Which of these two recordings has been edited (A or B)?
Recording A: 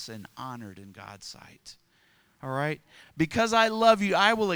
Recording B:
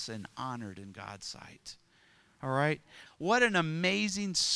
B